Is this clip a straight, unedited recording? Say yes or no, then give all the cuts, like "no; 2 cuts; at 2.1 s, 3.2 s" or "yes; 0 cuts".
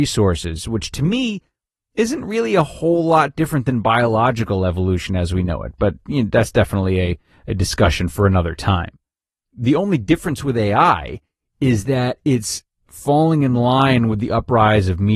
yes; 0 cuts